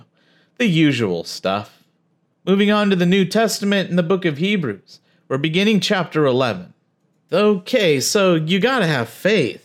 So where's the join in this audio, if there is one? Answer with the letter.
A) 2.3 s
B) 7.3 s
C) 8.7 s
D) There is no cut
B